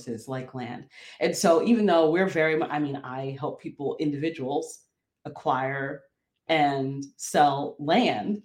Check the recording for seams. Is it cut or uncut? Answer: uncut